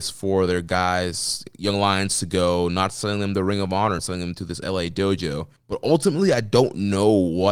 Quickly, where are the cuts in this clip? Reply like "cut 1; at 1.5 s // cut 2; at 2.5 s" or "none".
cut 1; at 4.0 s // cut 2; at 5.6 s